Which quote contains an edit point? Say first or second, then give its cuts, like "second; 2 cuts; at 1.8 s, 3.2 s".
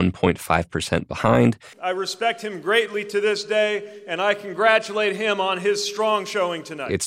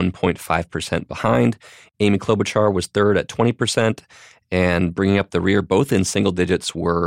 first; 1 cut; at 1.7 s